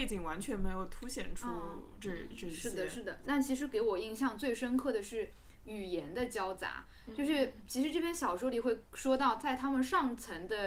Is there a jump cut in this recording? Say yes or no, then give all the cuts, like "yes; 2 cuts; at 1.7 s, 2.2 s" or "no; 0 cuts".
yes; 1 cut; at 3.2 s